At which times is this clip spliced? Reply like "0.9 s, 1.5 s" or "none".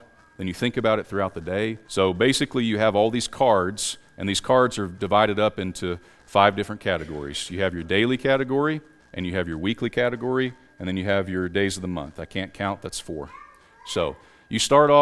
1.8 s, 9.0 s